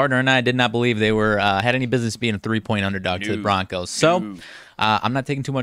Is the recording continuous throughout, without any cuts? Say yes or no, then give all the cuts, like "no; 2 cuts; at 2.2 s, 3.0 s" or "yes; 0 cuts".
yes; 0 cuts